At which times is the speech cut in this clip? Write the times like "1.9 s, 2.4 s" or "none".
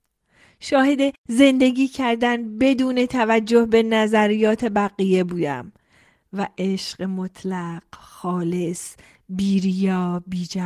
none